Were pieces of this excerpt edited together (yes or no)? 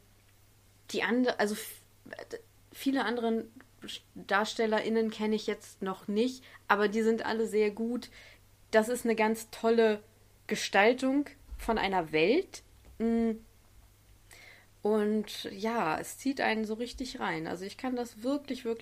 no